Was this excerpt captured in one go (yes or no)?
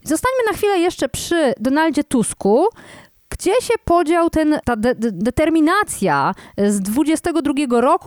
yes